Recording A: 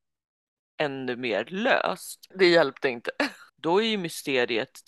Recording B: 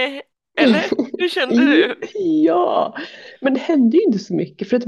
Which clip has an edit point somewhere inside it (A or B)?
A